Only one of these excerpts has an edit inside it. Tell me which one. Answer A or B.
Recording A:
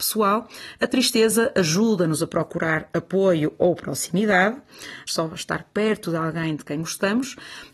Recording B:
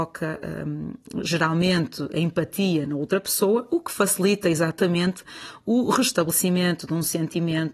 A